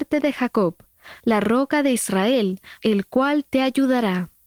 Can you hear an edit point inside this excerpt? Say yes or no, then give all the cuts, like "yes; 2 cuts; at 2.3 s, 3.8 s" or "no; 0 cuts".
yes; 2 cuts; at 1.2 s, 2.8 s